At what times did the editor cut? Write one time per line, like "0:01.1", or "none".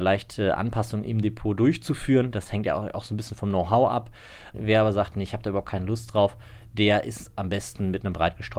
0:04.5